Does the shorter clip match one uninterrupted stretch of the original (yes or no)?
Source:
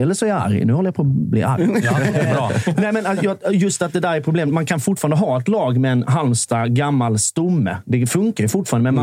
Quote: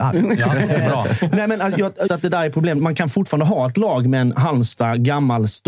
no